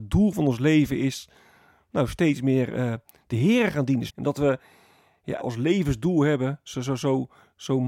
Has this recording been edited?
yes; 2 cuts; at 4.1 s, 5.4 s

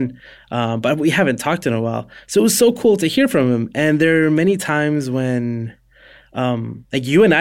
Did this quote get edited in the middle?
no; 0 cuts

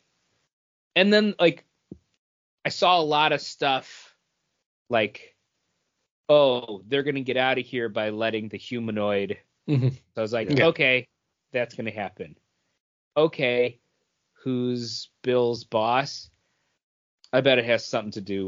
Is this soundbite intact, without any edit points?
no; 2 cuts; at 10.1 s, 14.3 s

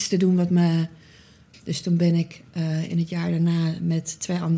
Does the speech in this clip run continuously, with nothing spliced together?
no; 1 cut; at 1.5 s

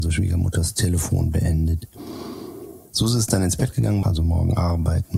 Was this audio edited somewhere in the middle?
yes; 1 cut; at 4.0 s

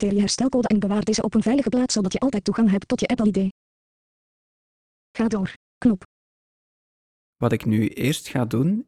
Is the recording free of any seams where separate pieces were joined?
yes; 0 cuts

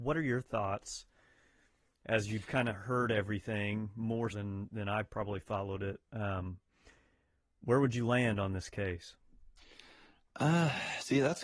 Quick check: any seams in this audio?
yes; 1 cut; at 4.3 s

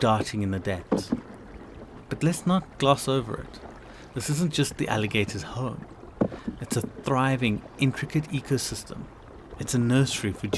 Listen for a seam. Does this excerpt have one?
no; 0 cuts

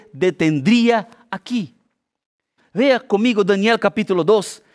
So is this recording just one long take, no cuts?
no; 1 cut; at 2.6 s

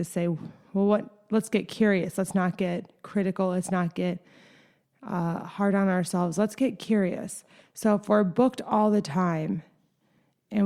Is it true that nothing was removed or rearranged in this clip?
yes; 0 cuts

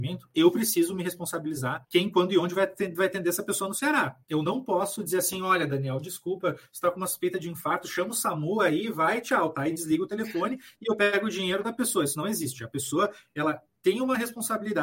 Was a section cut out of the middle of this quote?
yes; 1 cut; at 4.3 s

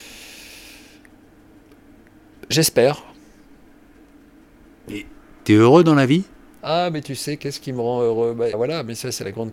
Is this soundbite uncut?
no; 2 cuts; at 7.4 s, 8.5 s

